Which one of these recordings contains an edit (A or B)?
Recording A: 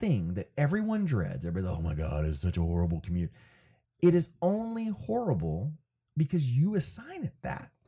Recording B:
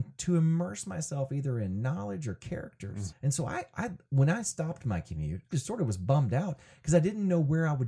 B